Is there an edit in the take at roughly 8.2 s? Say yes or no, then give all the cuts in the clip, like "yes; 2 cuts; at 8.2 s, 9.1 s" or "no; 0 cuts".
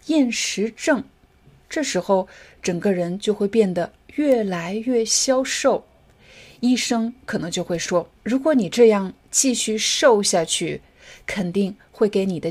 yes; 1 cut; at 8.2 s